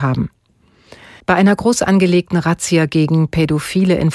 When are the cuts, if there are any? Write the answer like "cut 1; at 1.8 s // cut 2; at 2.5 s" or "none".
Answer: cut 1; at 1.2 s